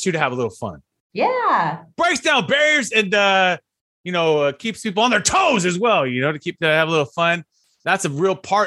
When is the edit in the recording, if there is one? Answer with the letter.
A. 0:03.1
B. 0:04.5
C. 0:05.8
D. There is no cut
D